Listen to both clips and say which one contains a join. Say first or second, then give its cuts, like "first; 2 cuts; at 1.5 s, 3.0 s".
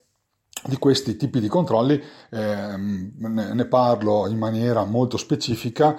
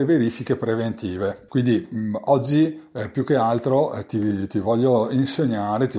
second; 1 cut; at 1.5 s